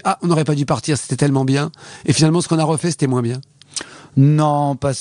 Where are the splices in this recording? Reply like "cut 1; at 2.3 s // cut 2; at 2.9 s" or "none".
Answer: none